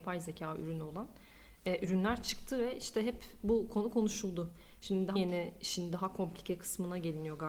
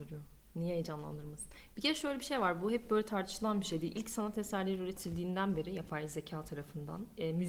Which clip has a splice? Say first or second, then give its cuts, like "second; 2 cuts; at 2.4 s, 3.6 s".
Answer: first; 1 cut; at 5.2 s